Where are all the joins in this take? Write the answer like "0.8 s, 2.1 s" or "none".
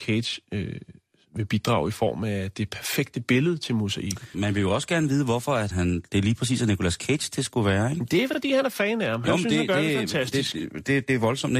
4.3 s, 5.7 s